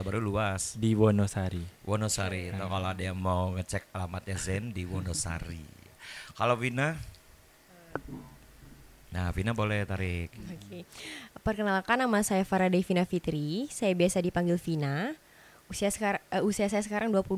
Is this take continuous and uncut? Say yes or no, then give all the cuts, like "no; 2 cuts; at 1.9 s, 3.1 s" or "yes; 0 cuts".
yes; 0 cuts